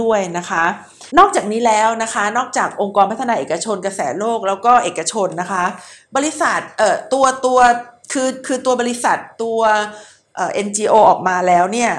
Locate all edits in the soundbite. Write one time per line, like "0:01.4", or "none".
0:01.1

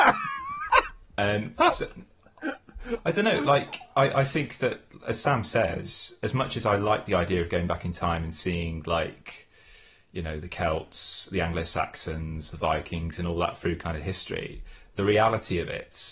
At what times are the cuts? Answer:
none

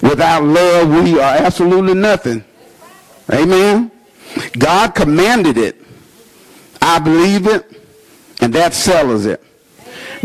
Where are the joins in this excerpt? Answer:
none

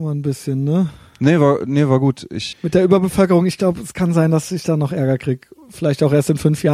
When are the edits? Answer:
0:02.5

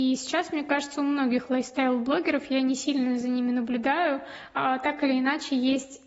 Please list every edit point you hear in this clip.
none

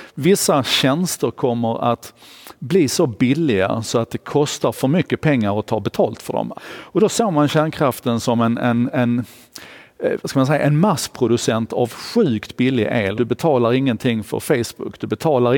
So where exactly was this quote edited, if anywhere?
0:06.5
0:13.2

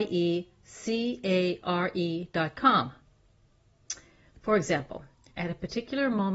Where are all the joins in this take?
0:05.3

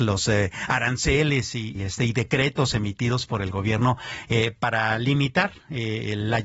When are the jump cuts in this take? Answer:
0:01.8

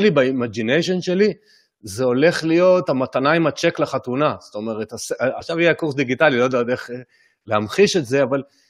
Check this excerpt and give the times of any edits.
0:05.4

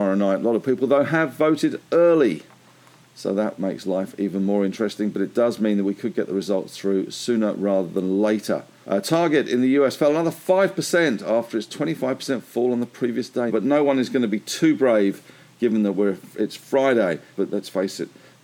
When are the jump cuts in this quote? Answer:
0:08.8
0:13.5
0:17.4

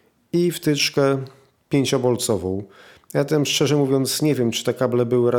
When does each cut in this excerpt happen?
none

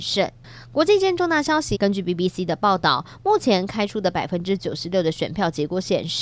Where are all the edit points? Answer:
0:01.7

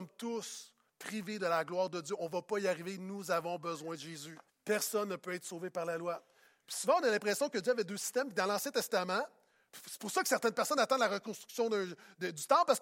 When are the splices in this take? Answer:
0:04.5

